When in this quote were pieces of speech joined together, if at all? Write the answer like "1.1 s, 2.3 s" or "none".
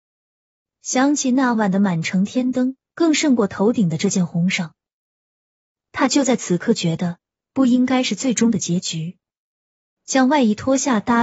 2.9 s, 7.4 s, 10.0 s